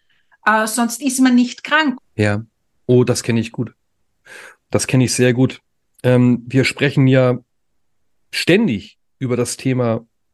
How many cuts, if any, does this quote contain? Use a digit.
1